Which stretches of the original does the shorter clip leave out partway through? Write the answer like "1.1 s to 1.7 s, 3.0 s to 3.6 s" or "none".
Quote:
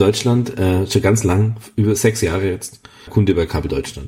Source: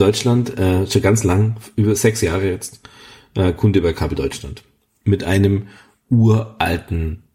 3.1 s to 3.5 s